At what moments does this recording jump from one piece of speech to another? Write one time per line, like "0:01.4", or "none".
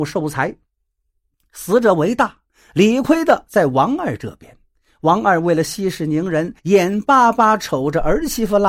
0:06.6